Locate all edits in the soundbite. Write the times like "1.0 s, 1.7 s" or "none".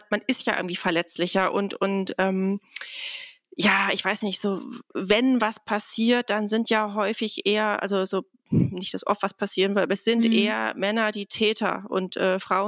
none